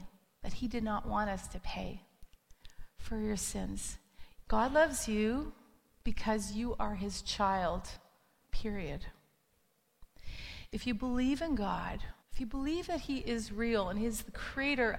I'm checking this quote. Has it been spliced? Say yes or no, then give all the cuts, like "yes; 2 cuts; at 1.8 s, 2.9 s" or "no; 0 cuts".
yes; 2 cuts; at 4.4 s, 12.2 s